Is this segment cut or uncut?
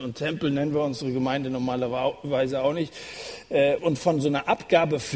cut